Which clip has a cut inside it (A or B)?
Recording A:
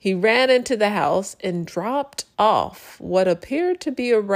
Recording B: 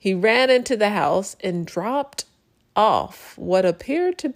A